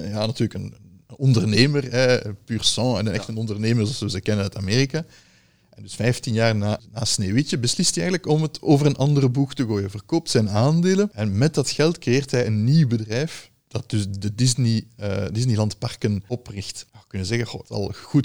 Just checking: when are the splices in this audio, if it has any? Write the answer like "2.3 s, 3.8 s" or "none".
none